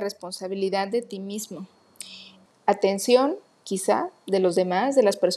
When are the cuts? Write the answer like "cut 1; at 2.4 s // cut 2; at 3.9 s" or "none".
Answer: cut 1; at 2.5 s

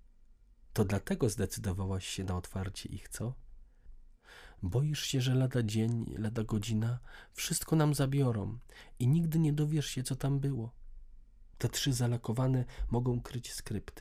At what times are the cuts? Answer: cut 1; at 4.6 s // cut 2; at 11.5 s

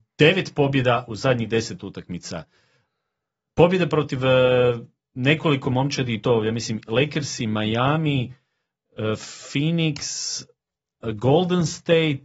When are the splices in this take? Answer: none

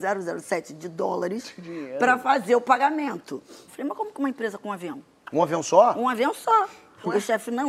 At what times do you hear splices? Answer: cut 1; at 3.7 s

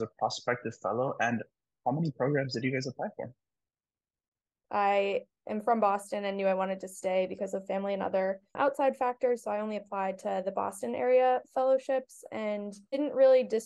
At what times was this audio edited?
cut 1; at 4.6 s // cut 2; at 8.5 s

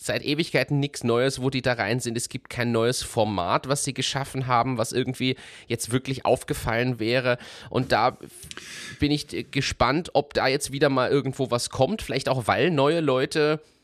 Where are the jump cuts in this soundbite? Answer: none

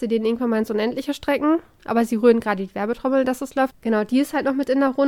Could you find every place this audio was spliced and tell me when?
cut 1; at 1.8 s // cut 2; at 3.7 s

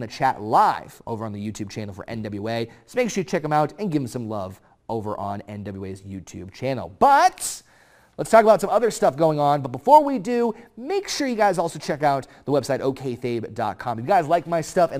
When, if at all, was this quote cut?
none

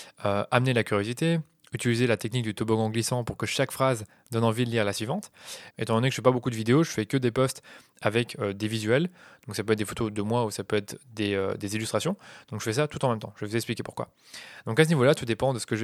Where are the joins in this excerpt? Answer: cut 1; at 5.7 s

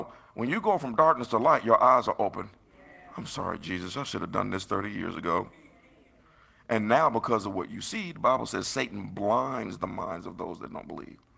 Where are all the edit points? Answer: none

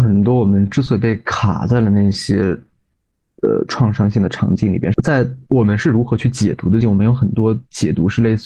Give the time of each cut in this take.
cut 1; at 4.9 s // cut 2; at 6.8 s

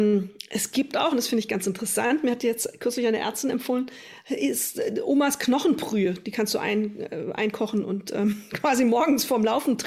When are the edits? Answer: none

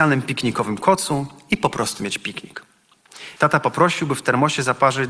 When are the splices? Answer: cut 1; at 3.4 s

